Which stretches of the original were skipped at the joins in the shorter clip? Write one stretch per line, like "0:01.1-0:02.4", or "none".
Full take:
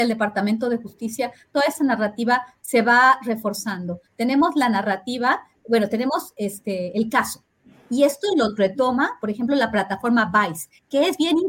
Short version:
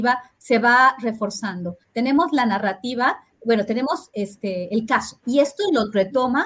0:07.5-0:07.9